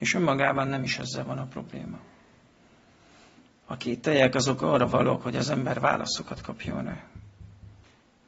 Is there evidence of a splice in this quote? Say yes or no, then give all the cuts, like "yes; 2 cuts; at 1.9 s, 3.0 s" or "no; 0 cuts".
no; 0 cuts